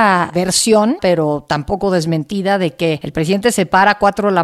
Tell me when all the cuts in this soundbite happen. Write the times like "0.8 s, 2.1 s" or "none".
1.0 s